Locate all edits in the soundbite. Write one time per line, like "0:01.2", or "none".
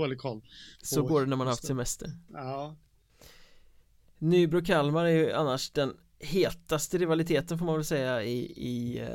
none